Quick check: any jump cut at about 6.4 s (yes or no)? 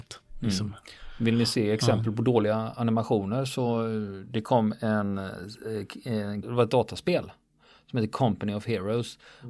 yes